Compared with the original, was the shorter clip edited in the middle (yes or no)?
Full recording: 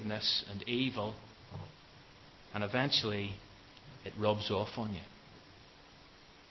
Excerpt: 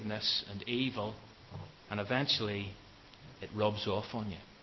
yes